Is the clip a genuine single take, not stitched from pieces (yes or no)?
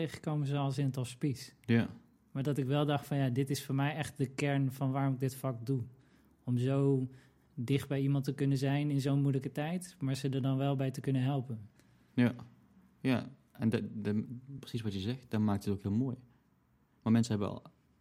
yes